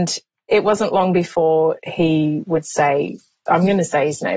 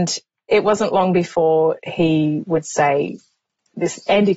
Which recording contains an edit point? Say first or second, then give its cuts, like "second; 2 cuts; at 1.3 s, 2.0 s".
first; 1 cut; at 3.5 s